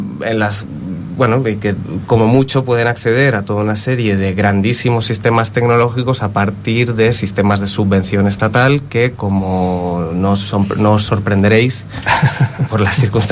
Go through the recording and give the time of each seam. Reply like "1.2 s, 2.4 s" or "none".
none